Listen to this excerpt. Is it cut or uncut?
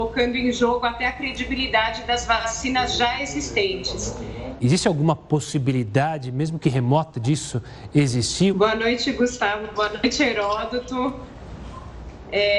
cut